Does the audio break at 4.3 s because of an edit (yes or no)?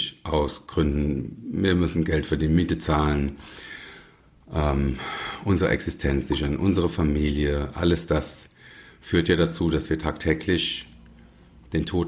no